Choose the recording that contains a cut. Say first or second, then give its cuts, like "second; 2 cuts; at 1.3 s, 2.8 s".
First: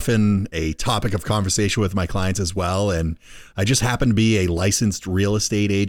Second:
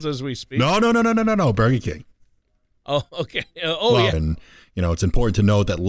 second; 1 cut; at 4.1 s